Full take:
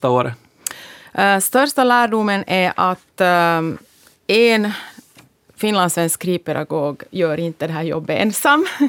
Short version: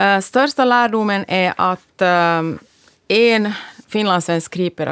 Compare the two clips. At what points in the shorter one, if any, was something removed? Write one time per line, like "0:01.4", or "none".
0:03.8